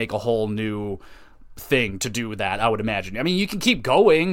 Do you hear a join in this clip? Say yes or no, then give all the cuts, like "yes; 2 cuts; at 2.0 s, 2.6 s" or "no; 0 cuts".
no; 0 cuts